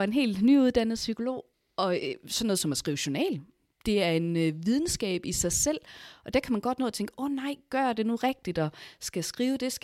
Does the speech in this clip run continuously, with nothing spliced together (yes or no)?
yes